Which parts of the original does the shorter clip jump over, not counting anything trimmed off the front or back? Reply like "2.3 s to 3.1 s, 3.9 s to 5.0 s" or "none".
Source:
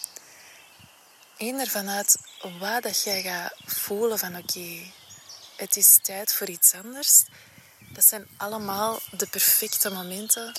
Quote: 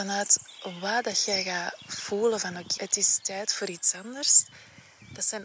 4.6 s to 5.6 s